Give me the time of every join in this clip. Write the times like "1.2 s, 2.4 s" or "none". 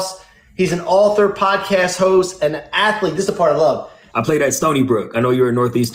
4.1 s